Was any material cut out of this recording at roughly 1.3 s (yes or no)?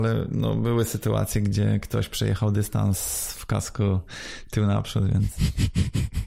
no